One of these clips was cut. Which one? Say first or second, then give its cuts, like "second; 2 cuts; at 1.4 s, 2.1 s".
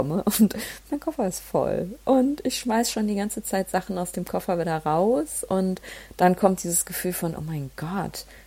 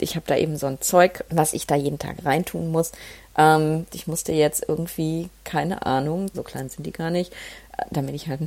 second; 3 cuts; at 1.3 s, 3.9 s, 6.3 s